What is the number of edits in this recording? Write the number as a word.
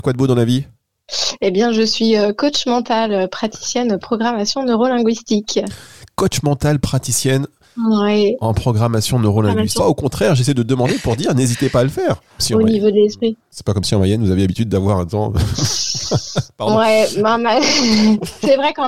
two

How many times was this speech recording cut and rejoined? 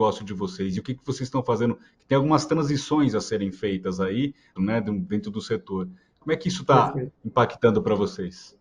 one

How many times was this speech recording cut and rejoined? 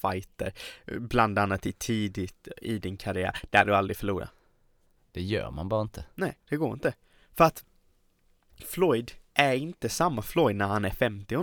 three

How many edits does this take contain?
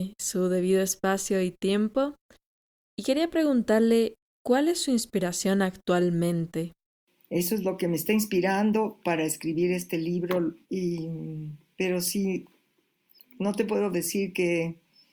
two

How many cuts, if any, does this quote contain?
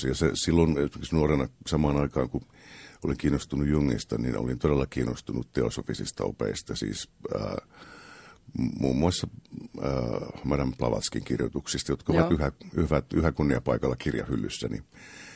zero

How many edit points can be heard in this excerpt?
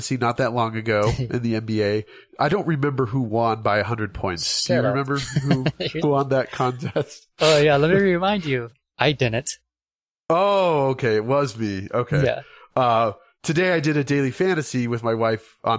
one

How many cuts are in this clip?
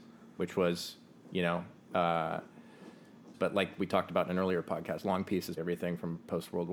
two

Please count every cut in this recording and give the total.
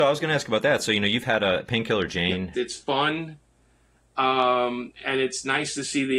one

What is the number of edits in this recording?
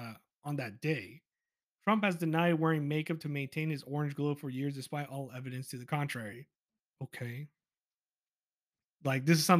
one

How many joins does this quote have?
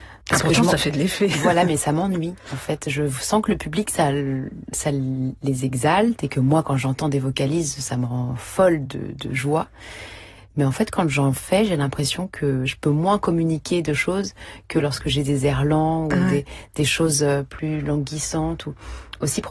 one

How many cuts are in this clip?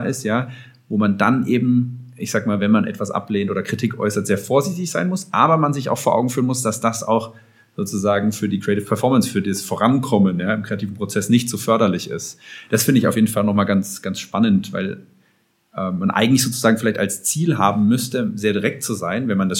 zero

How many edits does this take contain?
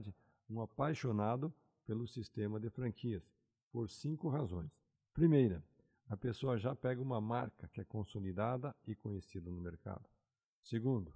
zero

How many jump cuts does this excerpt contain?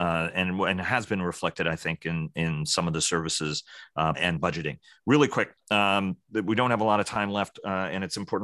one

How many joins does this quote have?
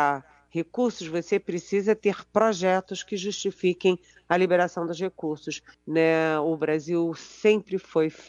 one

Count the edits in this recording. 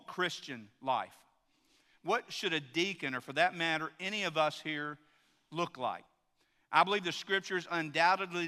zero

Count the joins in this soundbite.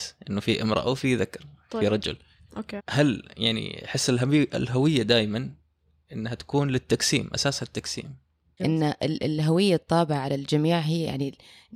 two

